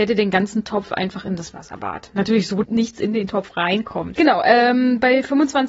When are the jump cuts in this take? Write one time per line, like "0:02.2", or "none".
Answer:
0:02.6
0:04.1